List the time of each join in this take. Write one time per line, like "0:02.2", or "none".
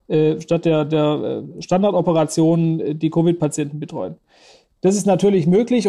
none